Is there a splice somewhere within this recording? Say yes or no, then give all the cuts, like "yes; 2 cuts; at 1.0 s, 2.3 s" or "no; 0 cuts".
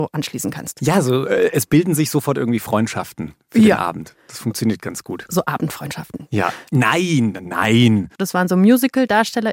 yes; 2 cuts; at 6.7 s, 8.1 s